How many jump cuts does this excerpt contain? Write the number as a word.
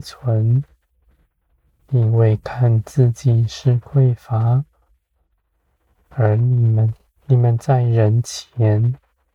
one